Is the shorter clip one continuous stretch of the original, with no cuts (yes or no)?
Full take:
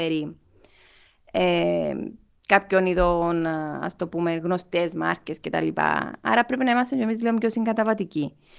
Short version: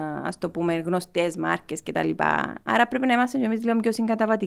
yes